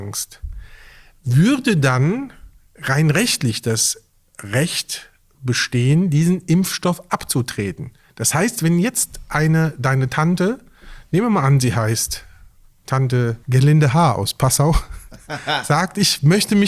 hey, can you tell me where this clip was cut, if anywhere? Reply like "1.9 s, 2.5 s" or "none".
13.4 s